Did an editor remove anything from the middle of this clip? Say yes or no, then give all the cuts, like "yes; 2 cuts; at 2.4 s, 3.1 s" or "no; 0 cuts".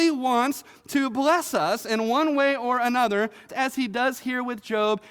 yes; 1 cut; at 3.5 s